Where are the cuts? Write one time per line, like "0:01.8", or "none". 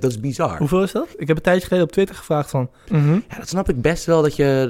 0:01.1
0:02.9